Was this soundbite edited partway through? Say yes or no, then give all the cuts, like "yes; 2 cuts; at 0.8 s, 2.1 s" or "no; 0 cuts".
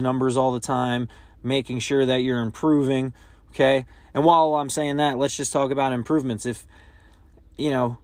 no; 0 cuts